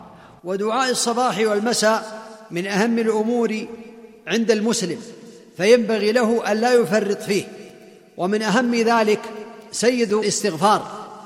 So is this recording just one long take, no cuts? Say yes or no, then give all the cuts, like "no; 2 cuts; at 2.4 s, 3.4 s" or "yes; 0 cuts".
yes; 0 cuts